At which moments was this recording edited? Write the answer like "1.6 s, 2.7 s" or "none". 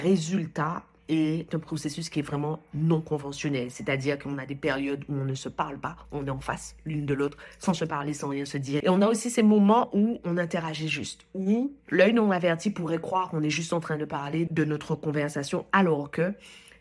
8.8 s, 14.5 s